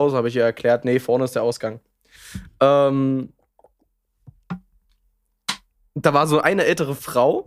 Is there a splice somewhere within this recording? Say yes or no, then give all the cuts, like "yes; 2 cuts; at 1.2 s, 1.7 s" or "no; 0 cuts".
yes; 1 cut; at 2.1 s